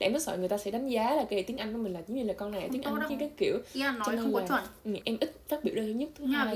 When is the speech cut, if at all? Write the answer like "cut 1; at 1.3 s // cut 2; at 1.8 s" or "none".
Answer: cut 1; at 3.1 s // cut 2; at 5.0 s